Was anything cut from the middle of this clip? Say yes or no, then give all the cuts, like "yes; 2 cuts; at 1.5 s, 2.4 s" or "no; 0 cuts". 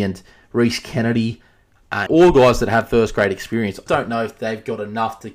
yes; 2 cuts; at 2.1 s, 3.9 s